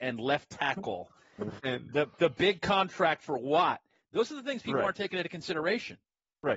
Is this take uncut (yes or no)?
no